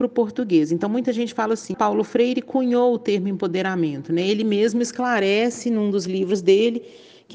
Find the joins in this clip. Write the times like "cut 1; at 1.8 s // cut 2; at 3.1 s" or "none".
cut 1; at 1.7 s